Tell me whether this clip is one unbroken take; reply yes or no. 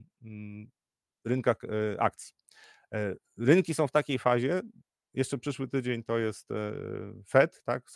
yes